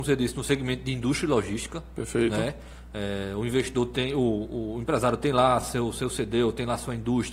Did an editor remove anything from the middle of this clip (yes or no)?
no